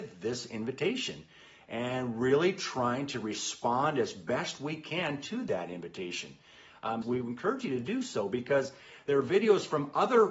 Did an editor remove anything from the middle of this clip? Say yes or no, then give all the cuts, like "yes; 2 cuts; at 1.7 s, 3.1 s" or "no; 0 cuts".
yes; 1 cut; at 7.0 s